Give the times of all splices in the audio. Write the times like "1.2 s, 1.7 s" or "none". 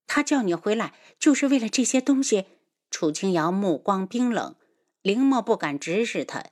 none